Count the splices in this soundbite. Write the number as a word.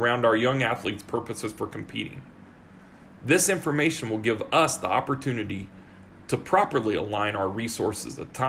zero